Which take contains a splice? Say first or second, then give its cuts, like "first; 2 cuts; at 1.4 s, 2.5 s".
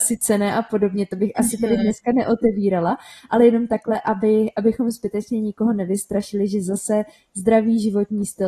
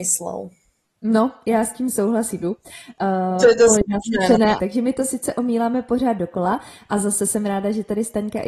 second; 2 cuts; at 2.4 s, 4.6 s